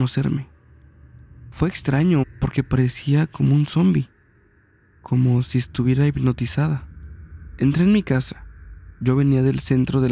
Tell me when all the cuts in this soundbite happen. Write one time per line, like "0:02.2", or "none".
0:02.2